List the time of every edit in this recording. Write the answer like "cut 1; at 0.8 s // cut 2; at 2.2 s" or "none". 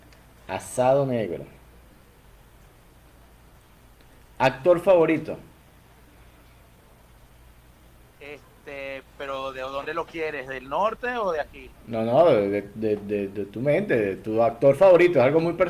none